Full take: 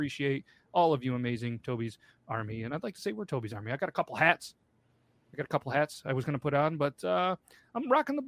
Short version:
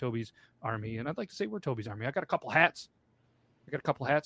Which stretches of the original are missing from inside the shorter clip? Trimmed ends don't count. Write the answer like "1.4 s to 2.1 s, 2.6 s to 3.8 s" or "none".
none